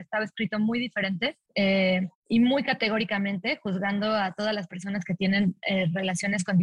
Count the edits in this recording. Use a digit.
0